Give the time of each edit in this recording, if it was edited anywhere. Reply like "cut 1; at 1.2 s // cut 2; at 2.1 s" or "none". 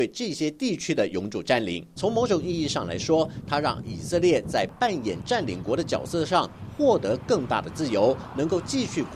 cut 1; at 2.0 s